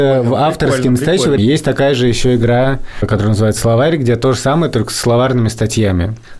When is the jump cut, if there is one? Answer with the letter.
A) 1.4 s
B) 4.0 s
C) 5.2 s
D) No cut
A